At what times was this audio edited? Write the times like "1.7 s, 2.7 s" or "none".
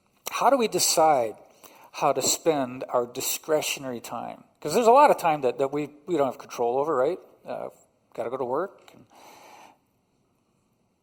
none